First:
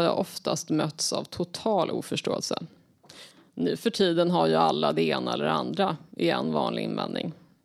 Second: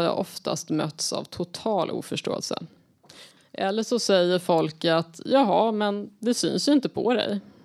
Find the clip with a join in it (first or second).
second